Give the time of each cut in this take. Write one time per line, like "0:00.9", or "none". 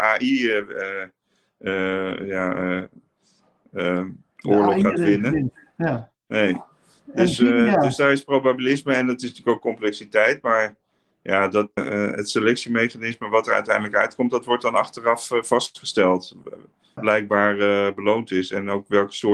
0:11.8
0:17.0